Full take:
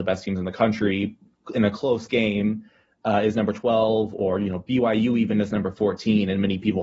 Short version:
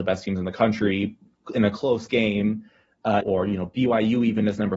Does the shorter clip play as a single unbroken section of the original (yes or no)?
no